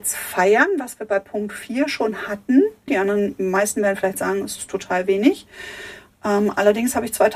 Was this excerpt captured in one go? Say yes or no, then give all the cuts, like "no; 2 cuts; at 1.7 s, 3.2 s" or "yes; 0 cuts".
no; 1 cut; at 2.9 s